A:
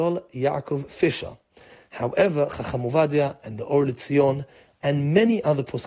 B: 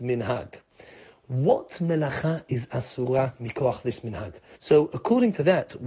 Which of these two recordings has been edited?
B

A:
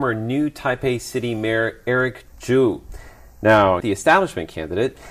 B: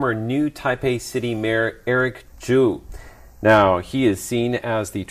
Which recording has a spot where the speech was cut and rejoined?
A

